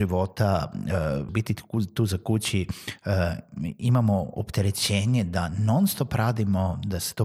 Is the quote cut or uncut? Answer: cut